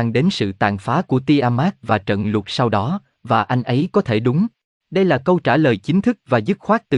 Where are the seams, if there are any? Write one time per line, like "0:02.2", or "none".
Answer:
0:04.7